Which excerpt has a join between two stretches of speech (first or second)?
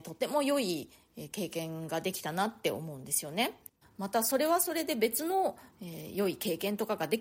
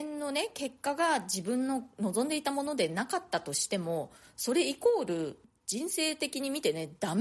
first